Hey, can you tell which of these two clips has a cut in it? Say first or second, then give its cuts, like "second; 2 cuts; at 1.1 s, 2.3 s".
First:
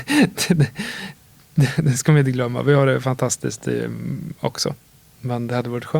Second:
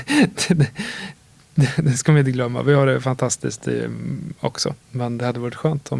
second; 1 cut; at 4.8 s